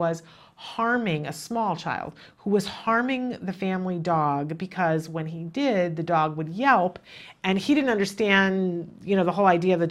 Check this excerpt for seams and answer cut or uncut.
uncut